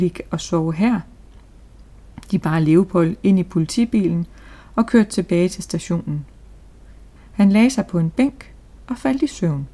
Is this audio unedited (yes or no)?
no